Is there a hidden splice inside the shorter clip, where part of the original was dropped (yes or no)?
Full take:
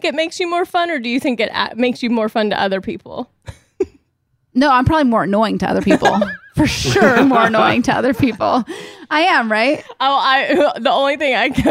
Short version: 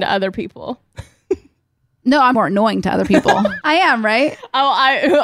yes